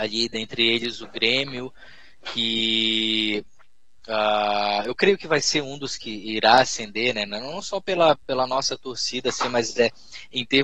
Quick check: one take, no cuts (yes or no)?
yes